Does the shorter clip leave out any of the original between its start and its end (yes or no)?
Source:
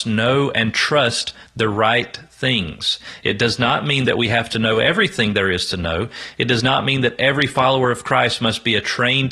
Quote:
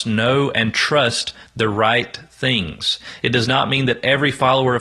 yes